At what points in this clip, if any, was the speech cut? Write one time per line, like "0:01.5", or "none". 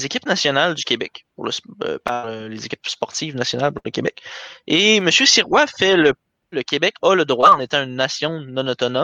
0:06.5